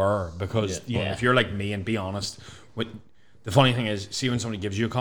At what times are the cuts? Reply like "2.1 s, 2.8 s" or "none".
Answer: 0.9 s